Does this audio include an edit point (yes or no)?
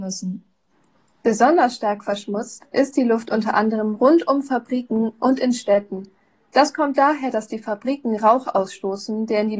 no